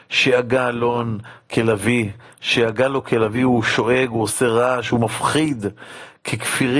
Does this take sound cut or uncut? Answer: uncut